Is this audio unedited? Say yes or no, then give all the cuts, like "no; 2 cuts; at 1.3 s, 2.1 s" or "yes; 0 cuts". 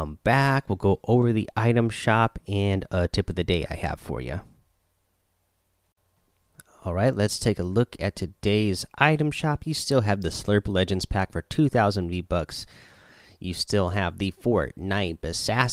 yes; 0 cuts